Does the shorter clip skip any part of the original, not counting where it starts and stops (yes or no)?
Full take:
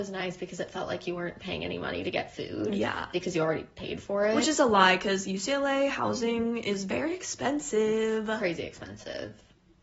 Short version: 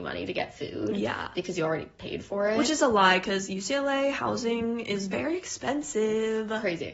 no